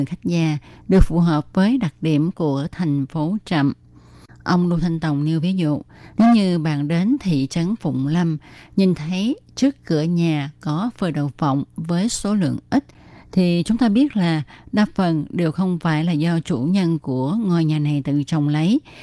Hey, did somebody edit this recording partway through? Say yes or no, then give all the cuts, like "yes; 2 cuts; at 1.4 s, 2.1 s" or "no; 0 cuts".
no; 0 cuts